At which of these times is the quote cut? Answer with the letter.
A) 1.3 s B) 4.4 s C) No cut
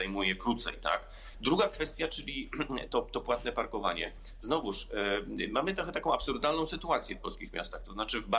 A